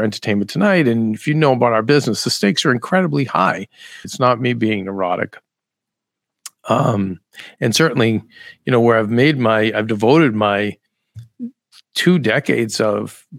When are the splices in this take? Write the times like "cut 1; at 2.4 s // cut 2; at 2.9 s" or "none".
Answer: cut 1; at 4.0 s